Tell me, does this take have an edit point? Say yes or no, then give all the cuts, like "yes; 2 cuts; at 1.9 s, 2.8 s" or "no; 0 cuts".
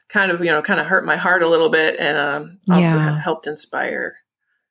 no; 0 cuts